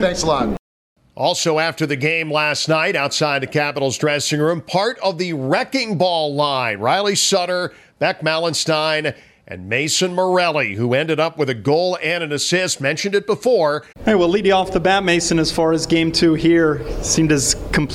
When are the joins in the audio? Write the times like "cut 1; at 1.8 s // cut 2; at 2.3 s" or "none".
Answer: cut 1; at 13.9 s